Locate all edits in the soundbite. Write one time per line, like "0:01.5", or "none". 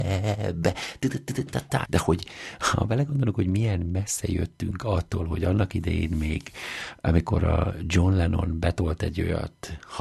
0:01.9